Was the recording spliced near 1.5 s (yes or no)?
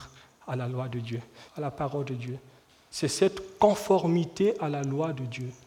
yes